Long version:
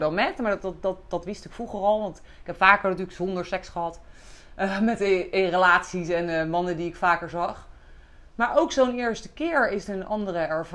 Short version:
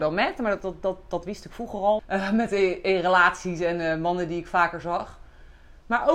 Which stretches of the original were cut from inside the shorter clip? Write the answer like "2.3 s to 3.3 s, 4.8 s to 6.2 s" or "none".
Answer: 2.0 s to 4.5 s